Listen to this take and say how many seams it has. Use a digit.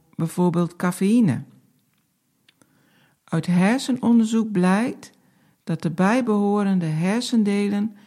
0